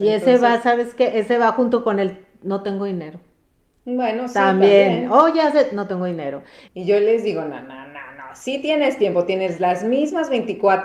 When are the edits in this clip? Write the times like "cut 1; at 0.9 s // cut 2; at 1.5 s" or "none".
cut 1; at 6.7 s